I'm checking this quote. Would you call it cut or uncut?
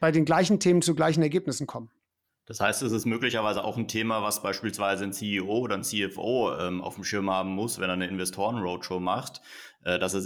uncut